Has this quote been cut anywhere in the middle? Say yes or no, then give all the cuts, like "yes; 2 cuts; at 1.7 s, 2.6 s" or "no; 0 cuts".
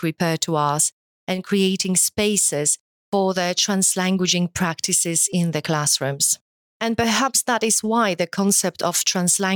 yes; 1 cut; at 6.7 s